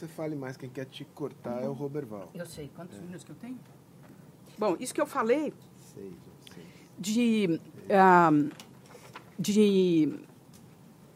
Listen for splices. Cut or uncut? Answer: cut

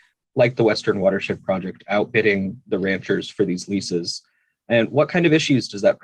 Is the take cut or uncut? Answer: uncut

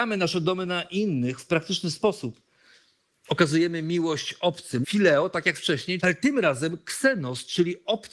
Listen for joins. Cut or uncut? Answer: cut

